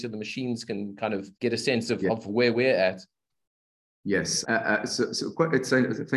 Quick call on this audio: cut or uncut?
cut